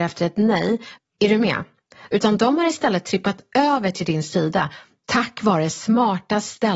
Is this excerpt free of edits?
no; 2 cuts; at 1.0 s, 2.1 s

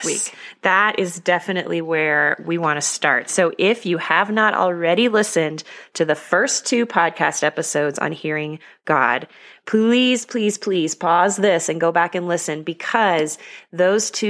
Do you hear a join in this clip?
no; 0 cuts

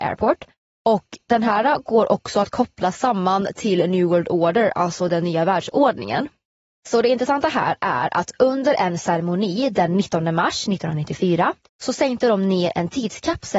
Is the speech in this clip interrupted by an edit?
yes; 1 cut; at 11.7 s

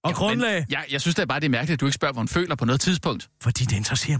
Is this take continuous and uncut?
yes; 0 cuts

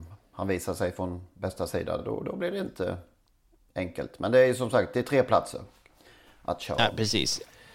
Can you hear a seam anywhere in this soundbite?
no; 0 cuts

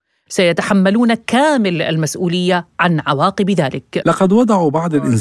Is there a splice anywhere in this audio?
yes; 1 cut; at 4.0 s

